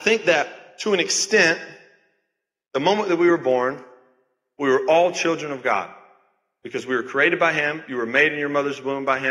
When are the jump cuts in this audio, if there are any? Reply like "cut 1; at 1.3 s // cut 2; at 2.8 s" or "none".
none